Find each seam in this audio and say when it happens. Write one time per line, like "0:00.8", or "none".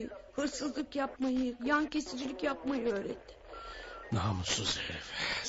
0:01.6
0:04.1